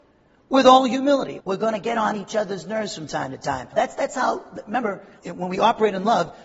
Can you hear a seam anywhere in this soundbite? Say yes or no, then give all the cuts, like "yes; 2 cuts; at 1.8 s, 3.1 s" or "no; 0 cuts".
yes; 3 cuts; at 1.4 s, 3.7 s, 5.2 s